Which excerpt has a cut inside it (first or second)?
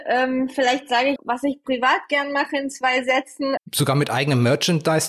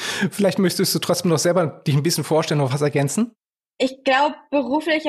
first